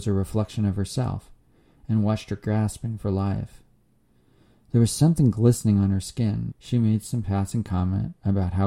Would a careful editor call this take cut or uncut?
cut